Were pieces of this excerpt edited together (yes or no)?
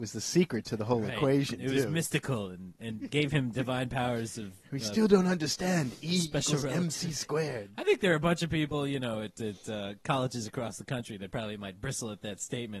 no